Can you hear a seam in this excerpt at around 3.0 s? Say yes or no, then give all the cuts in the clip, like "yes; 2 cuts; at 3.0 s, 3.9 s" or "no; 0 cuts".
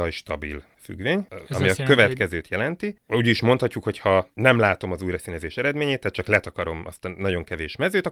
yes; 1 cut; at 3.0 s